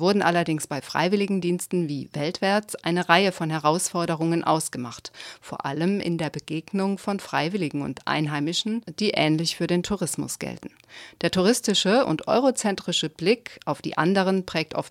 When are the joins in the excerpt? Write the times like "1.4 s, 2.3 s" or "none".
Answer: none